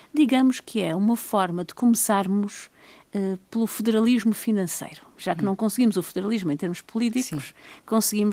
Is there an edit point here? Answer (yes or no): no